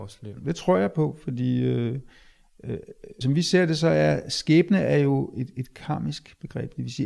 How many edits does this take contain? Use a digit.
1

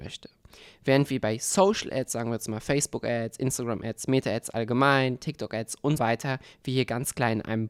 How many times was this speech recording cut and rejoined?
1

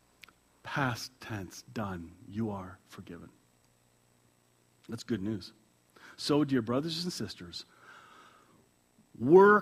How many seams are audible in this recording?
0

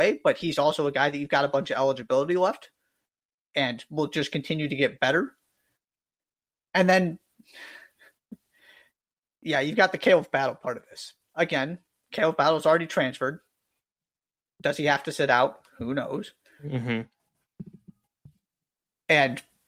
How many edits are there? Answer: 0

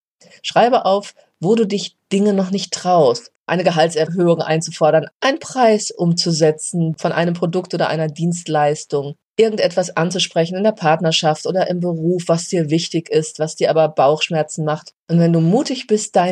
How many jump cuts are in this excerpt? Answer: 2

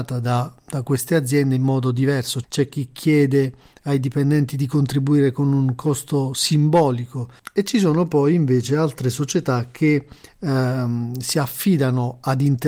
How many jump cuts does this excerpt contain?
1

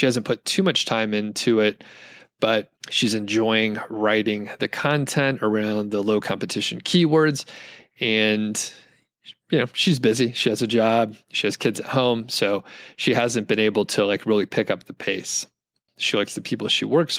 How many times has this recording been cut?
2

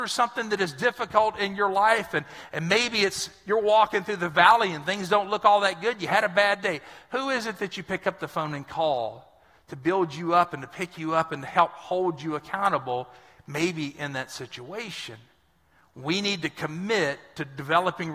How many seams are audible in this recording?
0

